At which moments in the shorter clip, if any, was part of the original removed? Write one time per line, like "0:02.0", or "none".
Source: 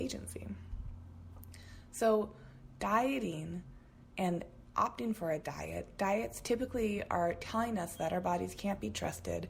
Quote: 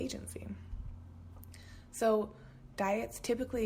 0:02.7